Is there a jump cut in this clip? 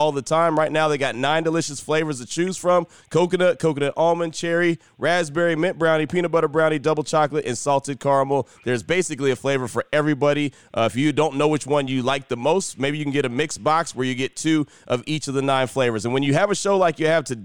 no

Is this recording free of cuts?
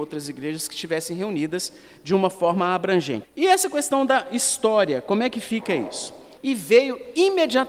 no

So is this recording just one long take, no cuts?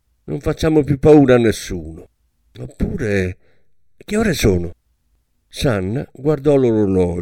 yes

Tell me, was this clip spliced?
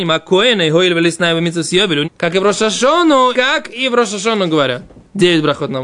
yes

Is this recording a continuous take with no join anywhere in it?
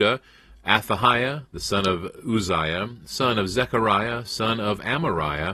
yes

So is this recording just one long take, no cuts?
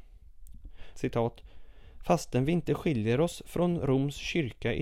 no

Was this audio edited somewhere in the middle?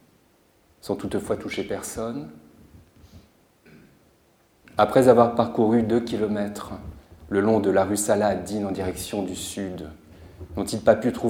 no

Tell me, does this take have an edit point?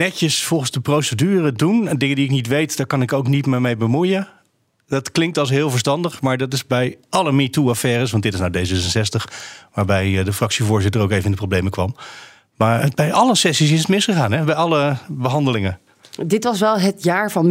no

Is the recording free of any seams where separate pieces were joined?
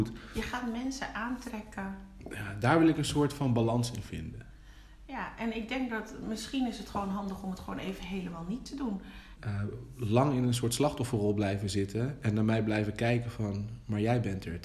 no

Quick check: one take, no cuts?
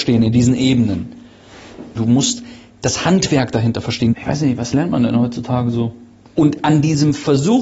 no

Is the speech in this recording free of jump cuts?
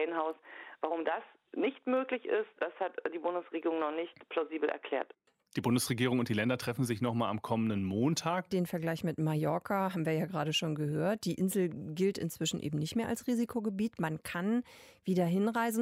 no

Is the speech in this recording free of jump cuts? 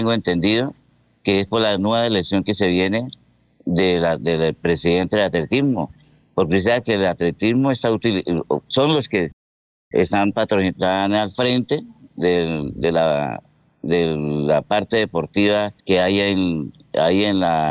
no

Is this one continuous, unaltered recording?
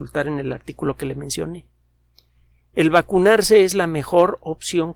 yes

